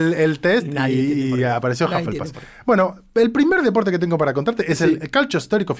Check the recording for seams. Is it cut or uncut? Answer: uncut